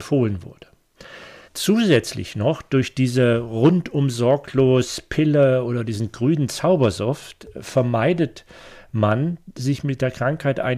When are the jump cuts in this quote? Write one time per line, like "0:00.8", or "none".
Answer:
0:01.4